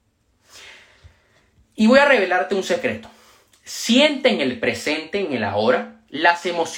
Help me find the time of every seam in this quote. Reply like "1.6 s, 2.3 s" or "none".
none